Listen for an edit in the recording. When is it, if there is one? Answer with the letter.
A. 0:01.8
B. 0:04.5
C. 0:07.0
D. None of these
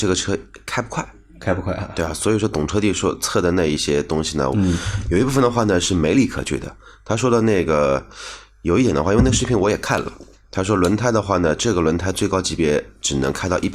B